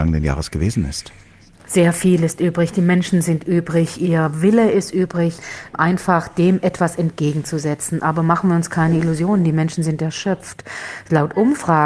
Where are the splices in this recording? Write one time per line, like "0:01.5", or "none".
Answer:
none